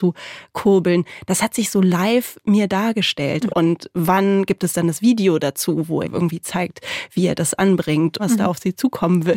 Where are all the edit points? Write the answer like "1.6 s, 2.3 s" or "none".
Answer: 3.5 s, 6.0 s, 8.2 s